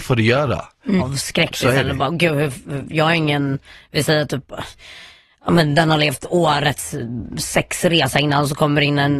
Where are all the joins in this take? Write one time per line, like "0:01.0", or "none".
0:01.0